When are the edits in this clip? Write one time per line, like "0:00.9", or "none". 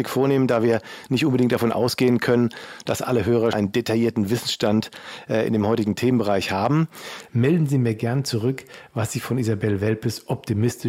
0:03.5
0:07.3